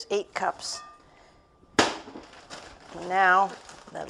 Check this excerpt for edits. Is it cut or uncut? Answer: uncut